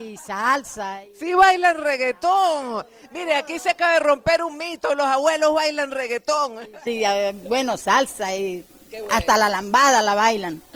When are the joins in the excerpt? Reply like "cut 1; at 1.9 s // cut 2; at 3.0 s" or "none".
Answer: cut 1; at 6.9 s